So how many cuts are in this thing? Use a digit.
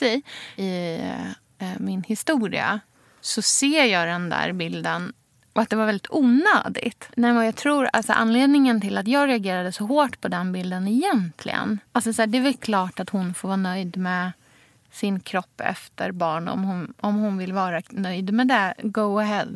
2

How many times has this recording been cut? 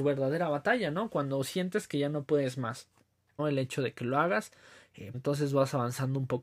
2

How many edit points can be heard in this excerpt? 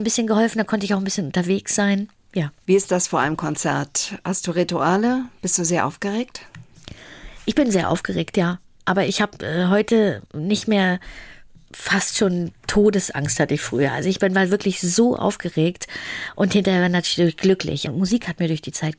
2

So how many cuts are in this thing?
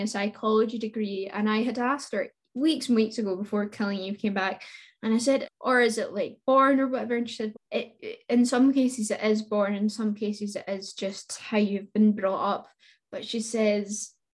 2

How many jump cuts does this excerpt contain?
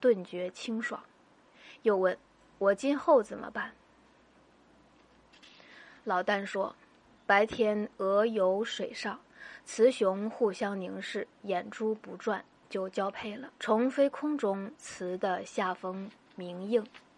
2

